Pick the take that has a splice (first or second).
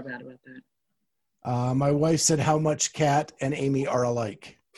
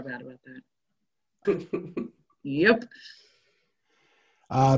second